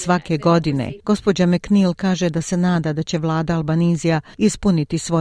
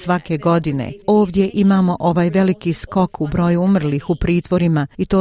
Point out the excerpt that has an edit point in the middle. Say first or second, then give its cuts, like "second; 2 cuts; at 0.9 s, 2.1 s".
first; 1 cut; at 1.0 s